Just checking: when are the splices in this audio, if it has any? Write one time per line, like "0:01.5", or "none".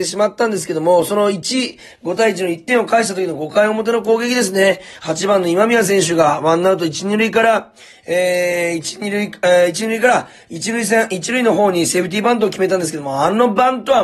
none